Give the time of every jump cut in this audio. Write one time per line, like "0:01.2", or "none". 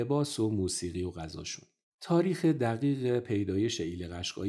0:01.8